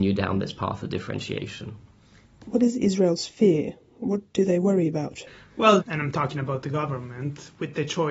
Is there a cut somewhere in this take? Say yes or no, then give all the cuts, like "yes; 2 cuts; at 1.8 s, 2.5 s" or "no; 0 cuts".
yes; 1 cut; at 5.8 s